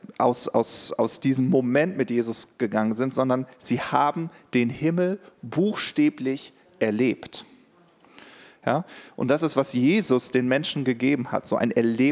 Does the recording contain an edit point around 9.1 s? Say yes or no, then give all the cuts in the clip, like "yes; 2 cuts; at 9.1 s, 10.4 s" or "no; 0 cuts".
no; 0 cuts